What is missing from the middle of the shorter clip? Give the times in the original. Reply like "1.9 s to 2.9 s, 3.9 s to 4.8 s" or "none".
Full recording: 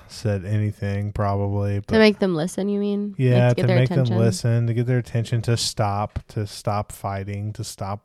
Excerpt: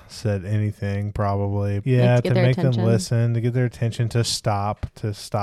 1.8 s to 3.2 s